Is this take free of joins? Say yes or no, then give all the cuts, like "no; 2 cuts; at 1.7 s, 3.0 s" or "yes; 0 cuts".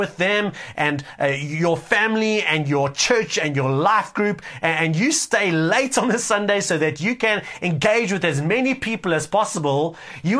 yes; 0 cuts